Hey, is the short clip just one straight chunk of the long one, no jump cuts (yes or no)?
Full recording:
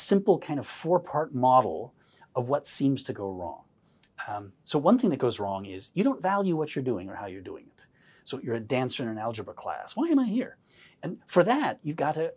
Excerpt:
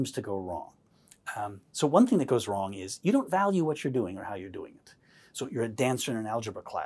yes